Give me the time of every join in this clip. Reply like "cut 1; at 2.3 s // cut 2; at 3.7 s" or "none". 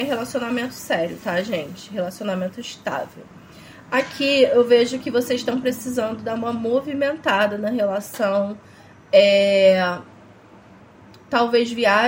none